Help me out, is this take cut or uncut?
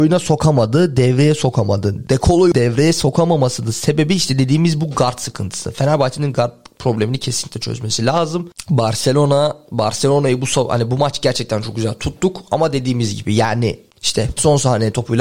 uncut